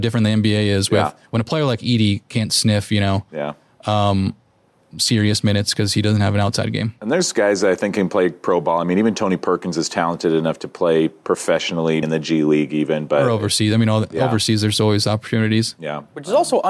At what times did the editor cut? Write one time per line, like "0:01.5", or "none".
0:12.0